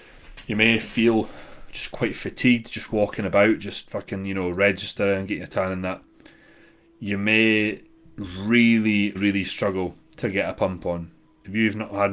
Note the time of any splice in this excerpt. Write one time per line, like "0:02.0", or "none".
0:09.2